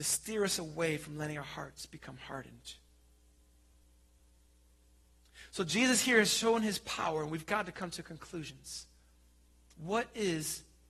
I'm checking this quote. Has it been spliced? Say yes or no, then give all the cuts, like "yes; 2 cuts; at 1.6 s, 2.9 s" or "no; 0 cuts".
no; 0 cuts